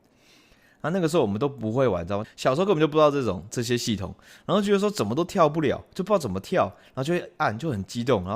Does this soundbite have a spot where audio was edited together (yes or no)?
yes